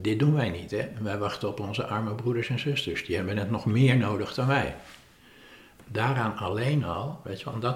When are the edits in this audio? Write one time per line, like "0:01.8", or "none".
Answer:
none